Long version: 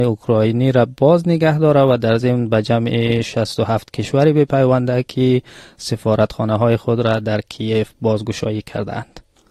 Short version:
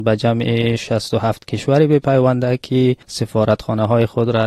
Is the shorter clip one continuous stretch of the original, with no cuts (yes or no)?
no